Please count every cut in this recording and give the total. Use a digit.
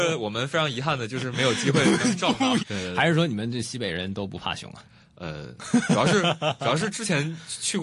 1